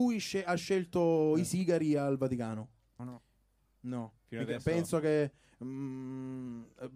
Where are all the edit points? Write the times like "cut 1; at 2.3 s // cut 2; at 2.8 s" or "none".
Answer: cut 1; at 3.0 s

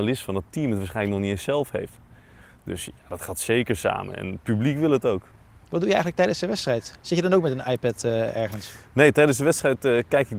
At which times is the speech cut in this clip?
none

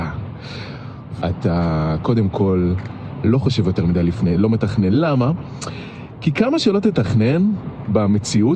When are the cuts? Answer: cut 1; at 1.2 s

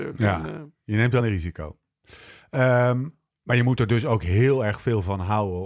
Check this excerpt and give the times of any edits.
cut 1; at 1.2 s

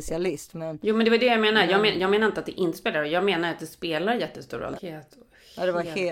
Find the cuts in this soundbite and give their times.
cut 1; at 4.8 s

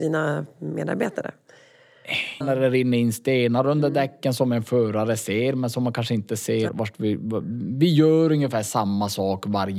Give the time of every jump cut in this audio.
cut 1; at 2.4 s // cut 2; at 6.7 s

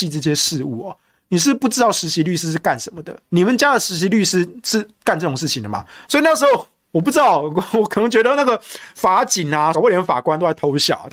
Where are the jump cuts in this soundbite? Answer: cut 1; at 6.0 s // cut 2; at 9.7 s

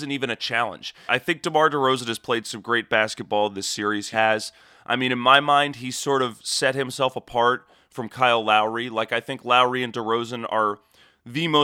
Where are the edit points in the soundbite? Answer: cut 1; at 1.1 s // cut 2; at 4.1 s

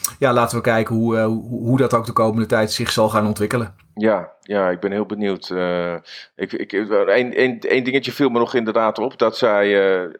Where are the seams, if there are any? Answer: none

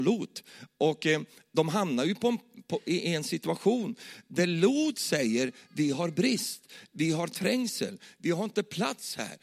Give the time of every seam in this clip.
none

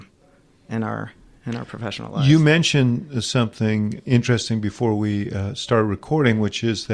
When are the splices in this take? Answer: none

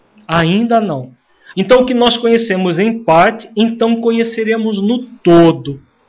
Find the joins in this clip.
cut 1; at 1.5 s

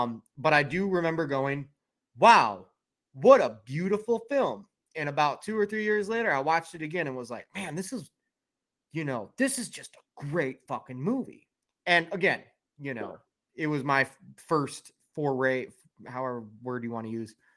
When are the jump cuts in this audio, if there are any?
none

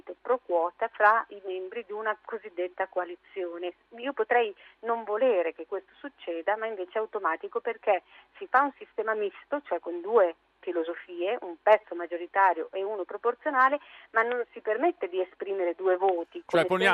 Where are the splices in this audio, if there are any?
none

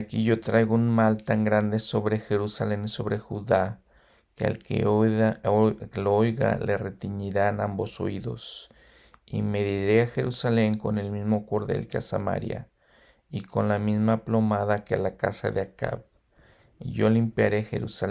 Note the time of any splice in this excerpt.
none

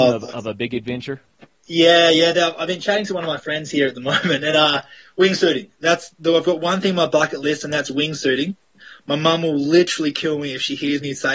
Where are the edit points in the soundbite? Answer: none

